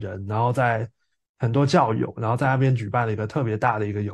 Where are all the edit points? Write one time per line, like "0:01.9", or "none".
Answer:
none